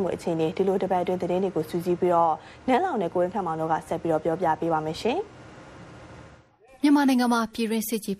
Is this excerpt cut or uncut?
uncut